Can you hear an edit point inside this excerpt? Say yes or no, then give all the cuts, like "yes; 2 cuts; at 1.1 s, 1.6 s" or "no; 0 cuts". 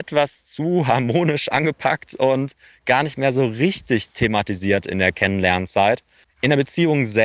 yes; 1 cut; at 6.2 s